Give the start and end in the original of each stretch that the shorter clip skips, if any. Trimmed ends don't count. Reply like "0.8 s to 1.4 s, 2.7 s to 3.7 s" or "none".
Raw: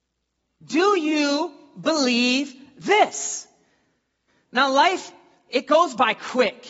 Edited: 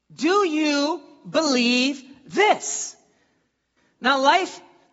none